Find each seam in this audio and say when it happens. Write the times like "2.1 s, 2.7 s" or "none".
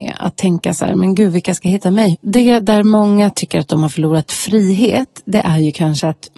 2.1 s